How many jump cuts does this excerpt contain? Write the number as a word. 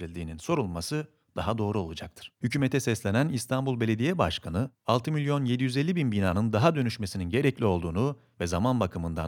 one